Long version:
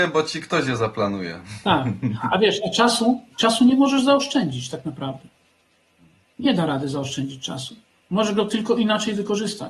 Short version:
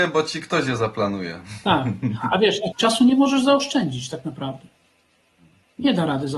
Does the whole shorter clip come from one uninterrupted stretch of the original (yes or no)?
no